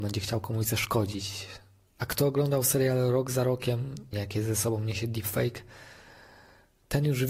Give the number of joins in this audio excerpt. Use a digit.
2